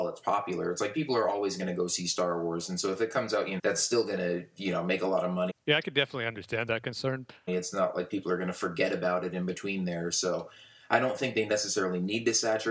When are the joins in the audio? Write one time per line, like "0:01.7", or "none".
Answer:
0:03.6
0:05.5
0:07.5